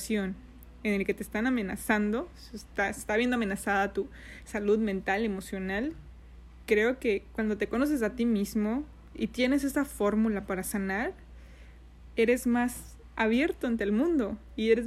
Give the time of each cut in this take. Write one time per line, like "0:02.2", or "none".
none